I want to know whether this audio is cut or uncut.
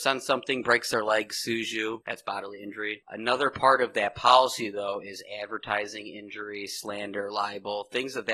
uncut